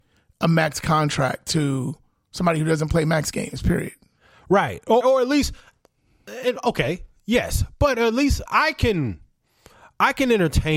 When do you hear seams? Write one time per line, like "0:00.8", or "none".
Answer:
0:05.0
0:08.5

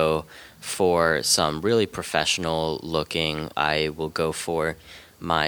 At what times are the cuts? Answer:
0:03.5

